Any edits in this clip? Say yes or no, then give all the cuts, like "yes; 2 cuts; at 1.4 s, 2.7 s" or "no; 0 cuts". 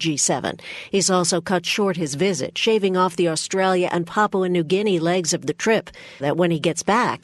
yes; 1 cut; at 6.2 s